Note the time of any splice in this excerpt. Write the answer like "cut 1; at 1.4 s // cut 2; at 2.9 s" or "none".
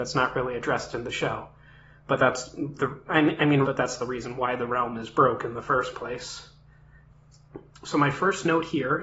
cut 1; at 3.6 s